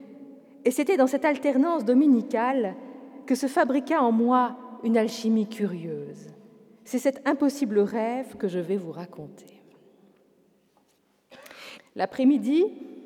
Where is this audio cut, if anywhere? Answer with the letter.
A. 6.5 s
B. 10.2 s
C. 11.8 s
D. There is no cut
C